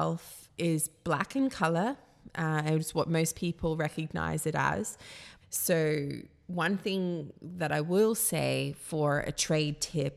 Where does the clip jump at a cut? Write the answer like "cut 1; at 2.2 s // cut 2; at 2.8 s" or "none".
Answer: cut 1; at 5.4 s